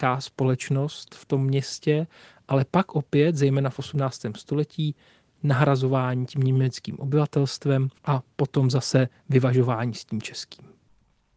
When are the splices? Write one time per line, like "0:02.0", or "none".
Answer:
0:08.0